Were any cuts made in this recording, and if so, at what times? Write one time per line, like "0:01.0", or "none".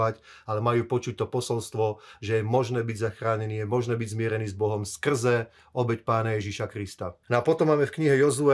0:07.2